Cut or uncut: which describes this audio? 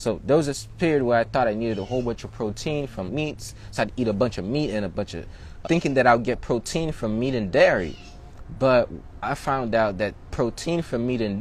cut